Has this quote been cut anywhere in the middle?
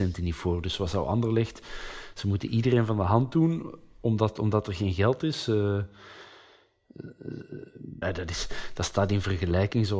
yes; 1 cut; at 8.0 s

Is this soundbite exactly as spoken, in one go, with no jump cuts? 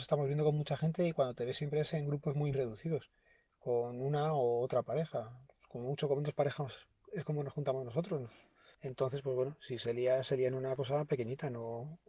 no; 1 cut; at 2.5 s

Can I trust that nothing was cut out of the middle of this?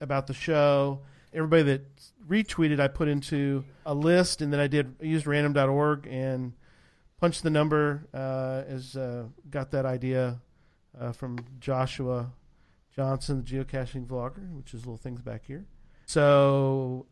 no; 3 cuts; at 1.3 s, 3.8 s, 16.0 s

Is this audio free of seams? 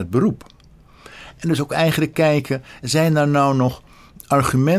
yes; 0 cuts

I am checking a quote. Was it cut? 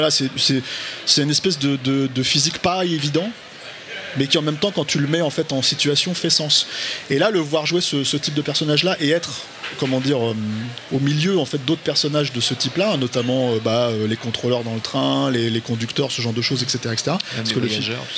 no; 0 cuts

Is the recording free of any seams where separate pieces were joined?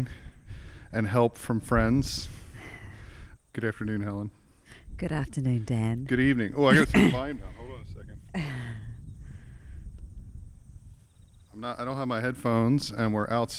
no; 1 cut; at 3.4 s

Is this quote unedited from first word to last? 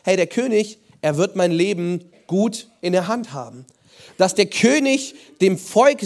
no; 1 cut; at 4.1 s

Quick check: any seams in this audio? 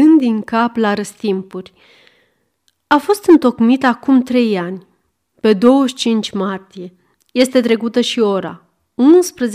no; 0 cuts

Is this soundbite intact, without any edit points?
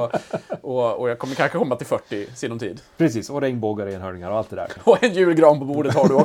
no; 1 cut; at 4.8 s

